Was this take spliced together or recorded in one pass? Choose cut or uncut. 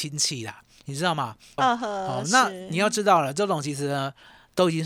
cut